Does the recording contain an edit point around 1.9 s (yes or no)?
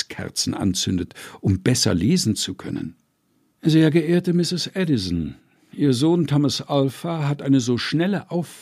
no